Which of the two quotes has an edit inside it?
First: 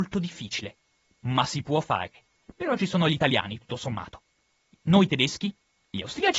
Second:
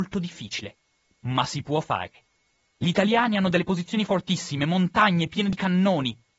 first; 1 cut; at 2.4 s

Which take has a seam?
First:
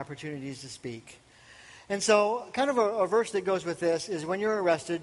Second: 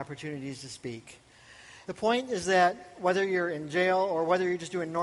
second; 1 cut; at 1.8 s

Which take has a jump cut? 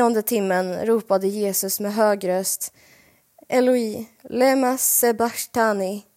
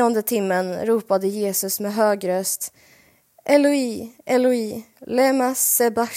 first; 1 cut; at 3.4 s

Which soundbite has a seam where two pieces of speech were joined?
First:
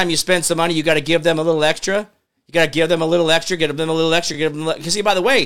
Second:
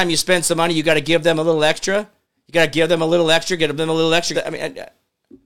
second; 1 cut; at 4.3 s

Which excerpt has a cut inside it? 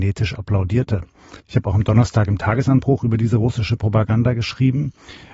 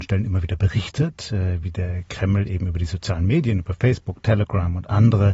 first; 1 cut; at 1.4 s

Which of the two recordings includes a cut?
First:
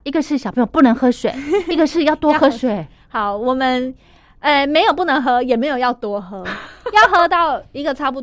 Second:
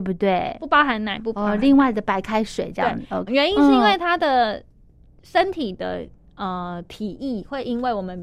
second; 1 cut; at 3.3 s

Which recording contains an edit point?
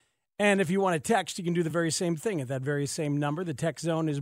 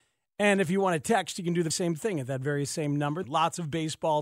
second; 2 cuts; at 1.7 s, 3.2 s

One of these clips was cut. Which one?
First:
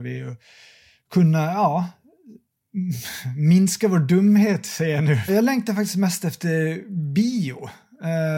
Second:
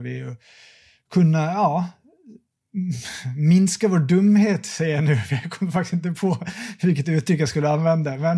first; 1 cut; at 5.3 s

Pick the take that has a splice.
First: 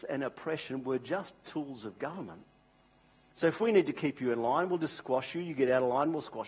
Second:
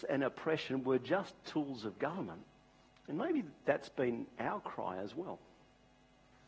second; 1 cut; at 2.9 s

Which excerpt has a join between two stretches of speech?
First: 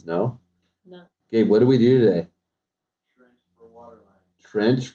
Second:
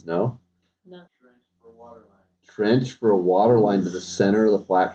second; 1 cut; at 1.1 s

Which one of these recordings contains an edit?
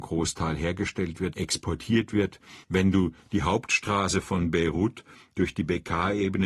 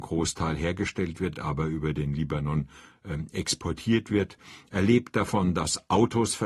first; 2 cuts; at 1.3 s, 2.6 s

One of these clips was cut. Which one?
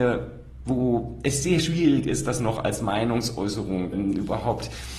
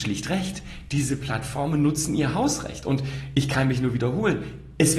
first; 1 cut; at 3.9 s

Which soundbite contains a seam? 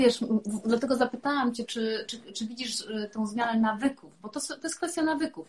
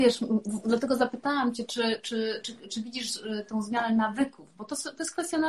first; 1 cut; at 1.7 s

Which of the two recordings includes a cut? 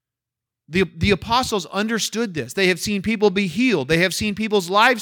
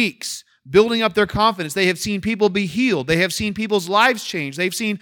first; 1 cut; at 2.5 s

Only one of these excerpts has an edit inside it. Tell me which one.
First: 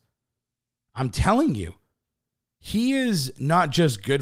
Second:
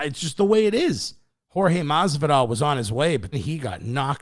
second; 2 cuts; at 1.4 s, 3.3 s

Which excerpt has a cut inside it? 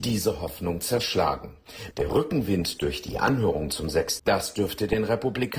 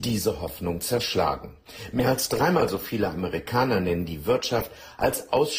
first; 2 cuts; at 1.9 s, 4.2 s

